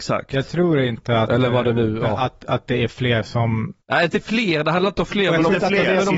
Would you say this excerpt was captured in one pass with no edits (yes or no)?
no